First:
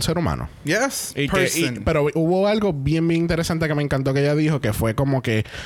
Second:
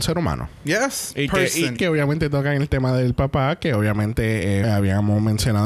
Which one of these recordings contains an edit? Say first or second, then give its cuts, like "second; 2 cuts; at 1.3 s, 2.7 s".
second; 2 cuts; at 1.8 s, 4.6 s